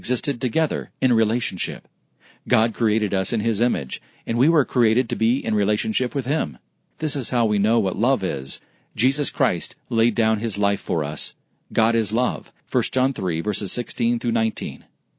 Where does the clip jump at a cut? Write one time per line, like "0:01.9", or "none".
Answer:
0:06.9
0:12.6